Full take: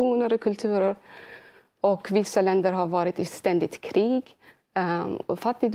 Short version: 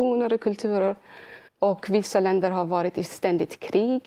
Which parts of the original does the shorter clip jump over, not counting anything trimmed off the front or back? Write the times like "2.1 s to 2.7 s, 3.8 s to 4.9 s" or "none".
1.5 s to 1.7 s

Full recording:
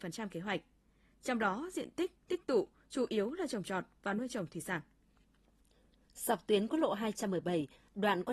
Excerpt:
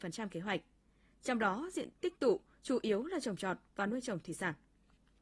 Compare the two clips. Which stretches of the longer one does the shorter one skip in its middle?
1.9 s to 2.2 s

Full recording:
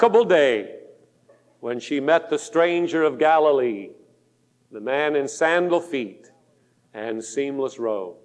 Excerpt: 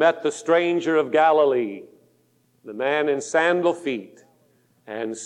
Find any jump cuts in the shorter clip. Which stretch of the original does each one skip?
none

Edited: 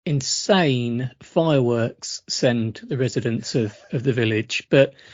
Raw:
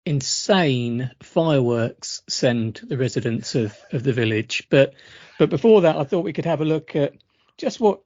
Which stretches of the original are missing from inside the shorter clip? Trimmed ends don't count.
none

